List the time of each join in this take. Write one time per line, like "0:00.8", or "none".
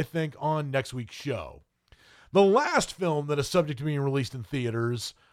none